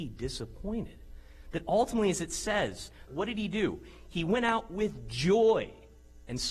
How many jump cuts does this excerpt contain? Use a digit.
1